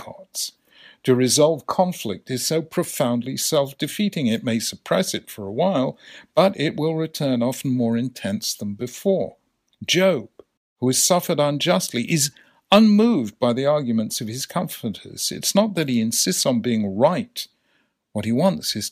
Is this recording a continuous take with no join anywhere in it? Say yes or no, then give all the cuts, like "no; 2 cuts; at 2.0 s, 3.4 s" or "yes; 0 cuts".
yes; 0 cuts